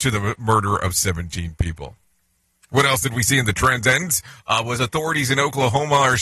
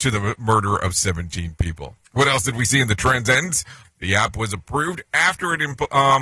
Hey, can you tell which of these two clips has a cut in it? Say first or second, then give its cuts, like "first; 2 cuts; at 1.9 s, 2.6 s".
second; 2 cuts; at 2.0 s, 3.8 s